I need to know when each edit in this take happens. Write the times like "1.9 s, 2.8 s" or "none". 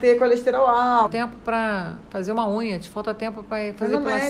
1.1 s